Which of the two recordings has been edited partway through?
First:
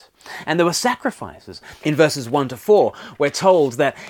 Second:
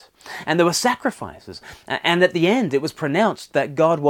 first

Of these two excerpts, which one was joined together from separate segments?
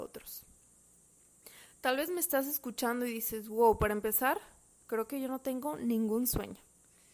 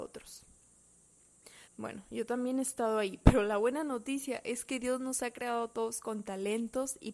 second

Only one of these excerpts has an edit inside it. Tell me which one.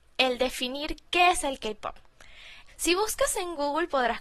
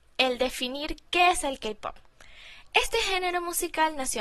first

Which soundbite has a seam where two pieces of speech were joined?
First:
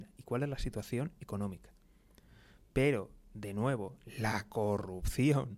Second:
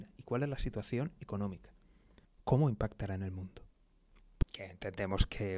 second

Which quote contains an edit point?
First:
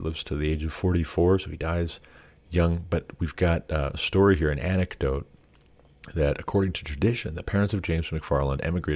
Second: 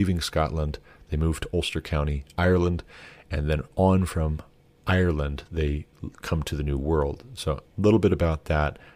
second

